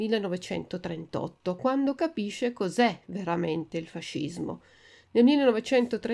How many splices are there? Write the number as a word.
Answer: zero